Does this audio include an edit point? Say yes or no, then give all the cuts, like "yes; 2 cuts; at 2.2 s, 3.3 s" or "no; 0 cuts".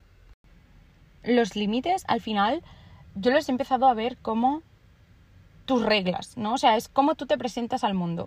no; 0 cuts